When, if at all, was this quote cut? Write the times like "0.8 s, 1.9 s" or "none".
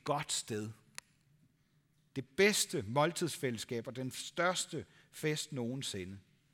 none